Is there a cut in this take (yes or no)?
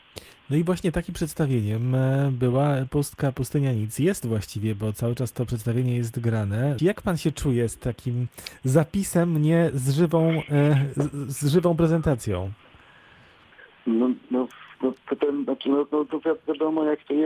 yes